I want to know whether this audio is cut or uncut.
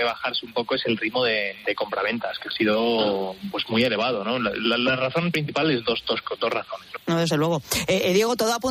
cut